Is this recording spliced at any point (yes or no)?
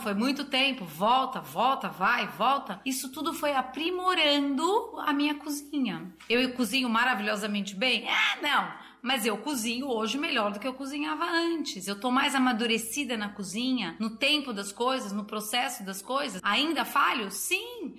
yes